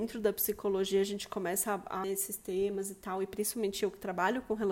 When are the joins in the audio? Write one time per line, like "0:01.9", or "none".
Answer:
0:02.0